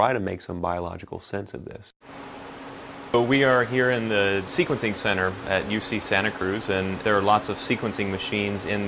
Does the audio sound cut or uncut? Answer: cut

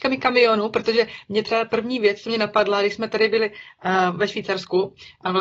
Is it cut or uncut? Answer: uncut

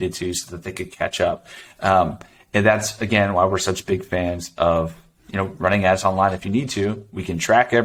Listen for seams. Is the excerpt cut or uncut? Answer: uncut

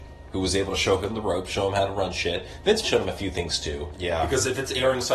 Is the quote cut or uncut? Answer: cut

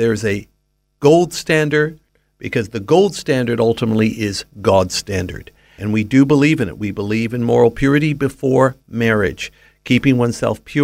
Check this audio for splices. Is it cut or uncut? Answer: cut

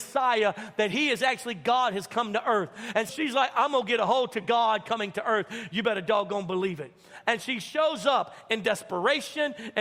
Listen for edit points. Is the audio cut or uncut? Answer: cut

